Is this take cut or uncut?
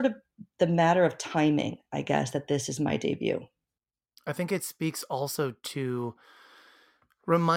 uncut